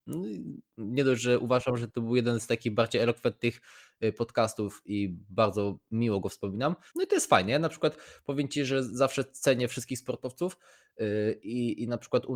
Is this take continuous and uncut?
no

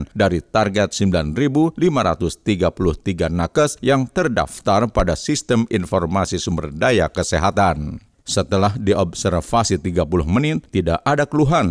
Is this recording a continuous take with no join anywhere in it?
no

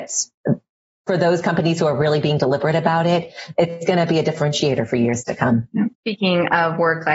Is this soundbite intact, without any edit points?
no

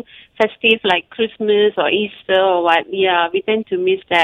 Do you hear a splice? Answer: yes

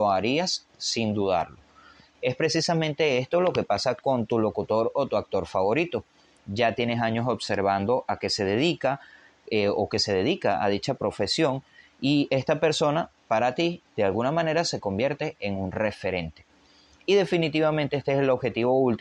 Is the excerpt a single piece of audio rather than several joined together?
yes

